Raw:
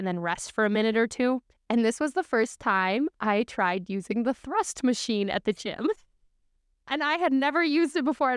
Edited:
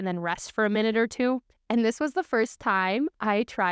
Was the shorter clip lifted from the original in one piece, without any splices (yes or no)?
yes